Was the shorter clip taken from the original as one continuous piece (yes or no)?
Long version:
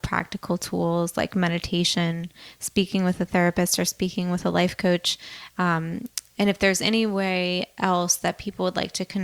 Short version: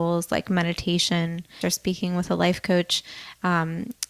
no